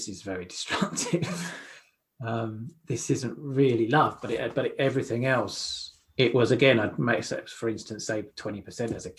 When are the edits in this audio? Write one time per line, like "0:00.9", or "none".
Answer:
none